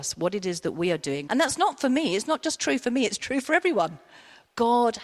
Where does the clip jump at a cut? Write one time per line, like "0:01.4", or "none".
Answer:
0:01.3